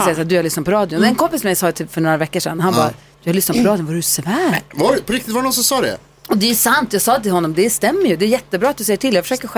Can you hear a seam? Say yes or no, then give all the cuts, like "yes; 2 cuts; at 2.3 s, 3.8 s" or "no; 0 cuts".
no; 0 cuts